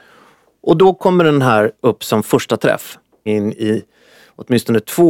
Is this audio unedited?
no; 2 cuts; at 1.8 s, 3.3 s

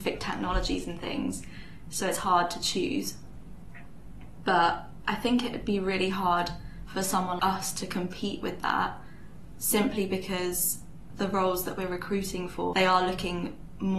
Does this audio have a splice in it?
yes; 2 cuts; at 7.4 s, 12.7 s

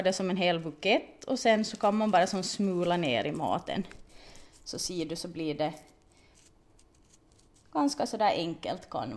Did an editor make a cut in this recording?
no; 0 cuts

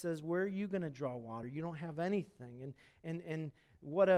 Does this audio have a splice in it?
no; 0 cuts

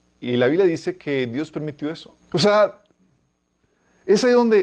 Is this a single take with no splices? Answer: no; 1 cut; at 2.2 s

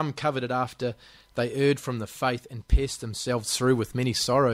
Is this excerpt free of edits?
yes; 0 cuts

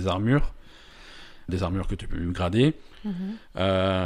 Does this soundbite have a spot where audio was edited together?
yes; 1 cut; at 1.5 s

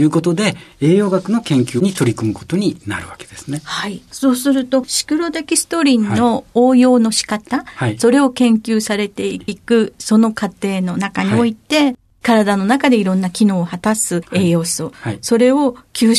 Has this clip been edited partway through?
no; 0 cuts

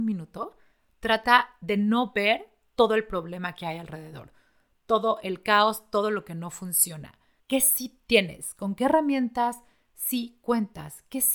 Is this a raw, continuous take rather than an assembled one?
no; 1 cut; at 7.4 s

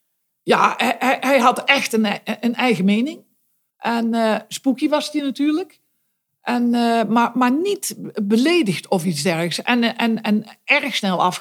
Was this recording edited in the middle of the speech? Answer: yes; 1 cut; at 3.7 s

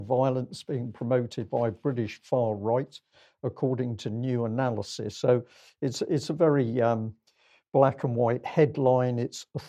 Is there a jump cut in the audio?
no; 0 cuts

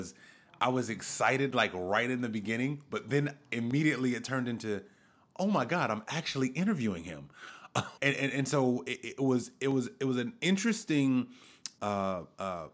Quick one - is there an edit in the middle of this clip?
yes; 2 cuts; at 8.0 s, 11.8 s

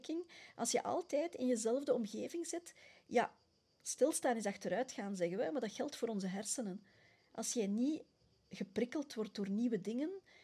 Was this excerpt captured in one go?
yes; 0 cuts

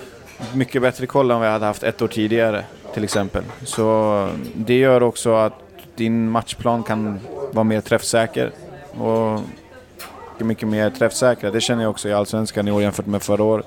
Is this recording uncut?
no; 2 cuts; at 8.9 s, 10.4 s

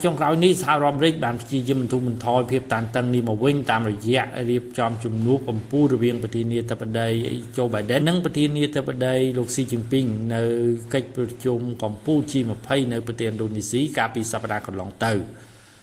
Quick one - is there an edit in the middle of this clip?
yes; 1 cut; at 8.0 s

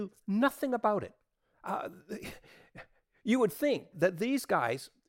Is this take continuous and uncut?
no; 1 cut; at 3.9 s

